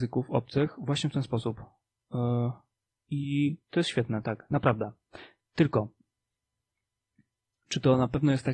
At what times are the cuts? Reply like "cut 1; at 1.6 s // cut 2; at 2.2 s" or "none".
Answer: none